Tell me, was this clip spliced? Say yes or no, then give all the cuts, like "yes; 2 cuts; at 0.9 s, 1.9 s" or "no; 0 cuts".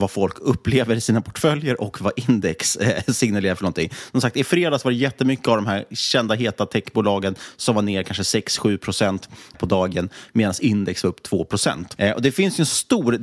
yes; 2 cuts; at 9.5 s, 12.0 s